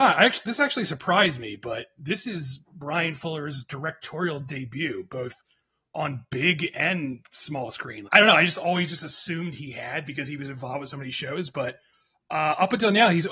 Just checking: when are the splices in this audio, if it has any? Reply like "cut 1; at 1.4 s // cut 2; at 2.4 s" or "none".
cut 1; at 8.1 s